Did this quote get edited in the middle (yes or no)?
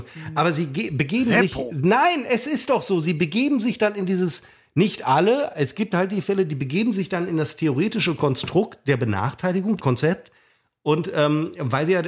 yes